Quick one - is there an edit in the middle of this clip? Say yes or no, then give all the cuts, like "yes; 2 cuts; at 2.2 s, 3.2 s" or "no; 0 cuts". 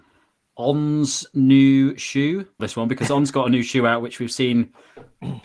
yes; 1 cut; at 2.6 s